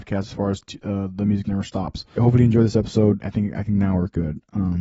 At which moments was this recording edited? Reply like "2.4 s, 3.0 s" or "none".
2.2 s, 3.2 s